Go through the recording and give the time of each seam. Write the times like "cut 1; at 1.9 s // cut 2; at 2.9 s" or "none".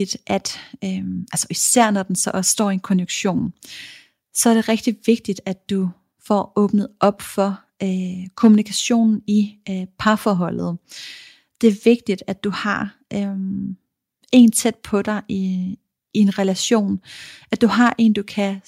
none